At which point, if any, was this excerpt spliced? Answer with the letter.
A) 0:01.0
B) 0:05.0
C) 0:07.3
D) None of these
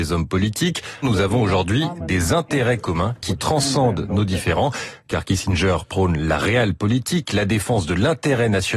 A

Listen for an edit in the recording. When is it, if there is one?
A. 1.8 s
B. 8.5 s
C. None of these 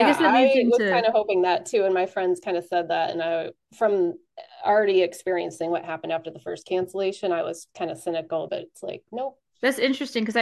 B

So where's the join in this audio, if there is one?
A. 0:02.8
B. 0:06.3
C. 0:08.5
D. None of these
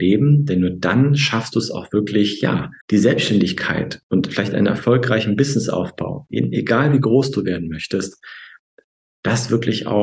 A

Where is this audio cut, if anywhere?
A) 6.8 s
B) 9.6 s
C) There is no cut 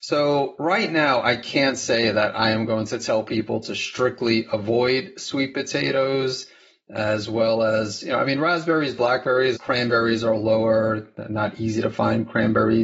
B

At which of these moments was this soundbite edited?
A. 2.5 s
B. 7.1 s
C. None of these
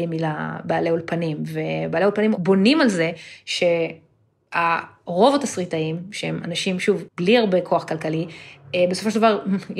B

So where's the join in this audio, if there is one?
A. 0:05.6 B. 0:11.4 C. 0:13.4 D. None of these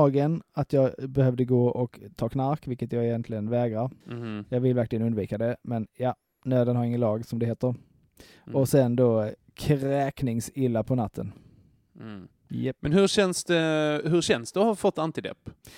D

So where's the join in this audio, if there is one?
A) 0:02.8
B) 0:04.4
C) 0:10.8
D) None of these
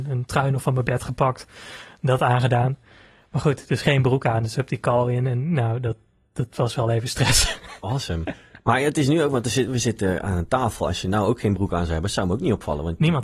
D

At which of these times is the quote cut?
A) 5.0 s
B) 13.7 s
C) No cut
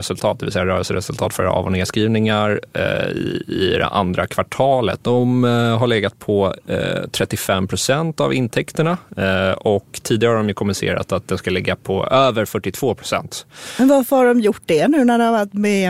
A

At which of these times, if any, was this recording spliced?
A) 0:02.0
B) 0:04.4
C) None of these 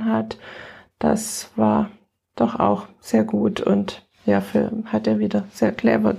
C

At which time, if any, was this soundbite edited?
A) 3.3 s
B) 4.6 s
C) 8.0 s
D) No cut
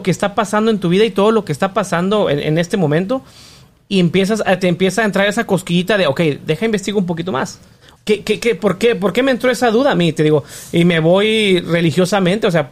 C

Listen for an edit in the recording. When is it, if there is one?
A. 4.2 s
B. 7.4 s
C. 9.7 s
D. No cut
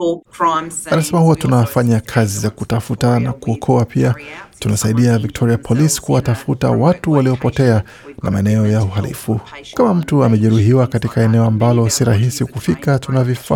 C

